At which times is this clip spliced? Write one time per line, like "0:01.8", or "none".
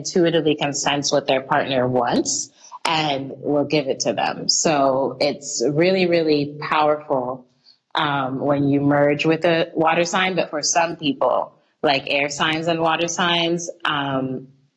none